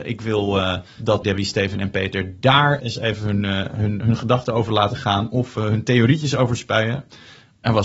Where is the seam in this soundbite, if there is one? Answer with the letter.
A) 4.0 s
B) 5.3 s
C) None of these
A